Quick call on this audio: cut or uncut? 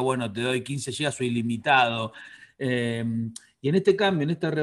uncut